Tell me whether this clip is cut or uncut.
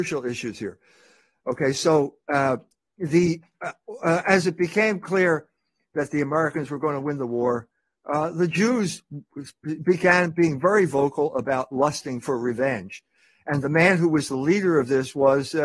uncut